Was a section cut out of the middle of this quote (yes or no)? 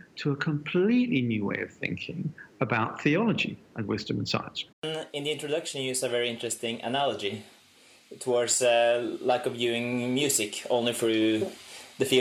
yes